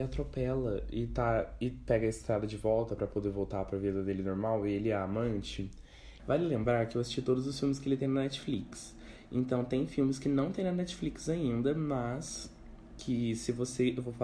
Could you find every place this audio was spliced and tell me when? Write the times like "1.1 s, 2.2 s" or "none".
6.2 s